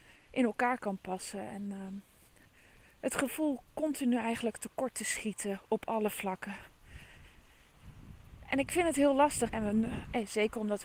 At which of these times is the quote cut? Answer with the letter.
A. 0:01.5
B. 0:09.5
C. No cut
B